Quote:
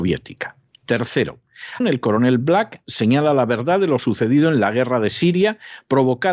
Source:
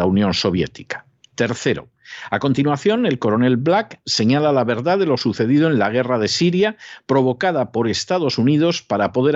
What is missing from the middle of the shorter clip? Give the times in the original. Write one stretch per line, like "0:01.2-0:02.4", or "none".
0:02.3-0:03.0